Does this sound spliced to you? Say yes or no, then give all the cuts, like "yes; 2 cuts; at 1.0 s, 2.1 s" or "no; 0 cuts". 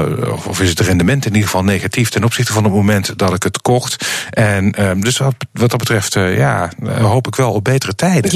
no; 0 cuts